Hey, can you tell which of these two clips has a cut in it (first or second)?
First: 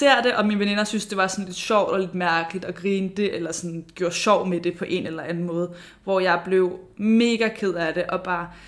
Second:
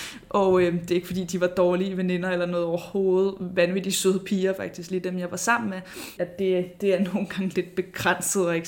second